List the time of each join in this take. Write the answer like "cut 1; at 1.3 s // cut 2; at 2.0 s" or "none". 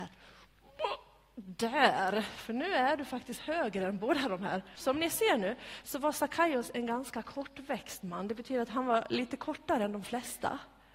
cut 1; at 4.7 s